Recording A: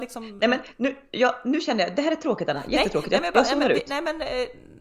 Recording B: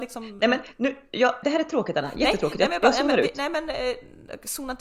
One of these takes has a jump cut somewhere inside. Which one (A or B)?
B